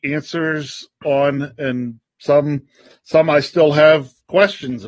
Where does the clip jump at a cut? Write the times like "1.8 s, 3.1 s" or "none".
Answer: 2.1 s